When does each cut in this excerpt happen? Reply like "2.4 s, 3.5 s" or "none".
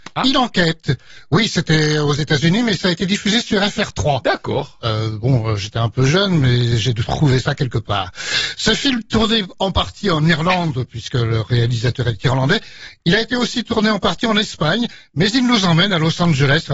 none